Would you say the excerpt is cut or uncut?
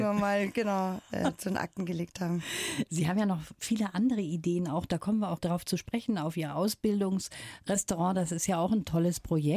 uncut